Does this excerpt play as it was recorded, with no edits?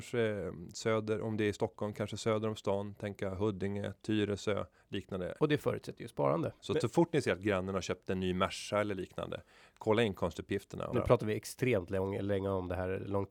no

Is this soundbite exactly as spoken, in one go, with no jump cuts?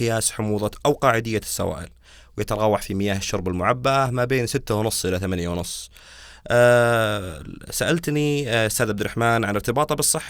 yes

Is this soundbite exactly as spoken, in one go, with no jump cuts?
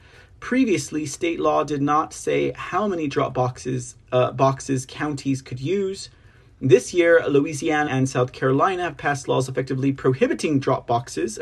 no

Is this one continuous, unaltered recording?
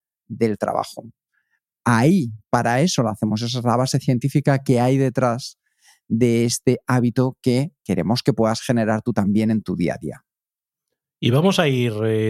yes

